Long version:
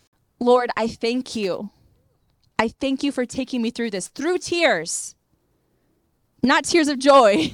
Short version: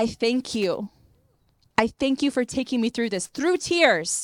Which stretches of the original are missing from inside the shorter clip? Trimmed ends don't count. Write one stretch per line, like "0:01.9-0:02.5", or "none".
none